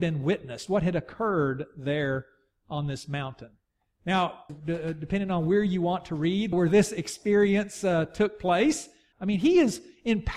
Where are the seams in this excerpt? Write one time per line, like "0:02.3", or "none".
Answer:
0:04.5
0:06.5
0:09.1